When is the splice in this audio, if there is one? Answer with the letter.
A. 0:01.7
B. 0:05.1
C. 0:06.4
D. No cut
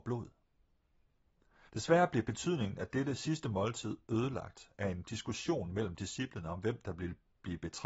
A